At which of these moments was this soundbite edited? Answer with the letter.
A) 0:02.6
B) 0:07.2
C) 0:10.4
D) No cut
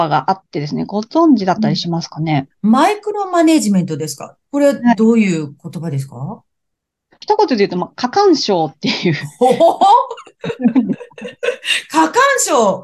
B